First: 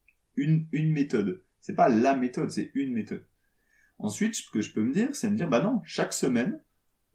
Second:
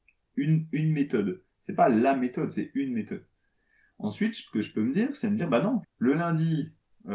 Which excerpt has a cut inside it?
second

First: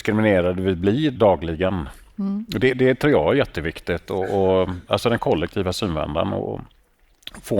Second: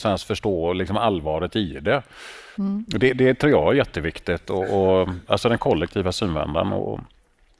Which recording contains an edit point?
second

